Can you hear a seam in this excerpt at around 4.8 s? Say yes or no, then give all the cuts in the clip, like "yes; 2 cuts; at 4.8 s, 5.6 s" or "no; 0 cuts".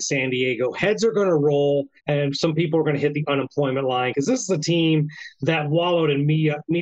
no; 1 cut; at 2.0 s